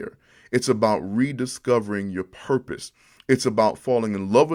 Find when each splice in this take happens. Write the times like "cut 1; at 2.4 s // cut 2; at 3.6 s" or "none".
none